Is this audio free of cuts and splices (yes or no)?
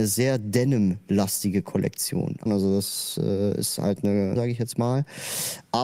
no